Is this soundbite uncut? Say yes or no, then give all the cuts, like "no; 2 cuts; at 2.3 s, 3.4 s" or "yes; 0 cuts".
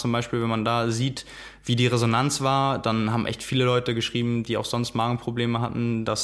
yes; 0 cuts